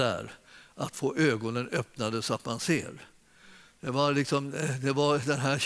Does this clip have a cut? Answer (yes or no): no